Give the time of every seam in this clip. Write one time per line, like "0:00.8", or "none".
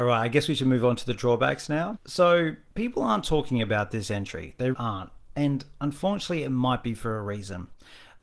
0:02.0
0:04.7